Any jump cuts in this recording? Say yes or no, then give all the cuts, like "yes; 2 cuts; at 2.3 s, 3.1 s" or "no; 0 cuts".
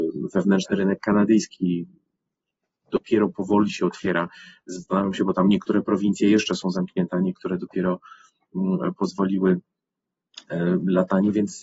no; 0 cuts